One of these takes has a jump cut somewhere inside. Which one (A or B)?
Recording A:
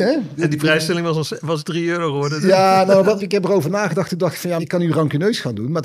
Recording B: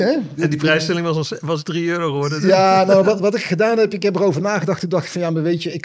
A